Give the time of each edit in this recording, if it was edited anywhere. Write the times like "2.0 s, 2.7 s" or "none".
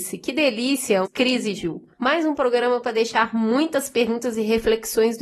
1.0 s